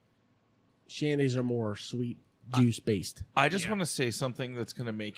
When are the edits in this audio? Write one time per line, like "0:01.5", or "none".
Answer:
none